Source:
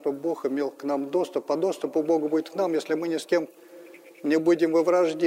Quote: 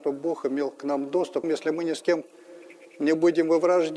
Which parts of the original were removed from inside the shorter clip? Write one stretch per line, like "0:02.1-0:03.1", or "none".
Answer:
0:01.4-0:02.7